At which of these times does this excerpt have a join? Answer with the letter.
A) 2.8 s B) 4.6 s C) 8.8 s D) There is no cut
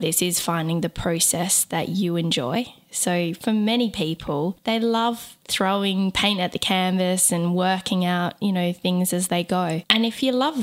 D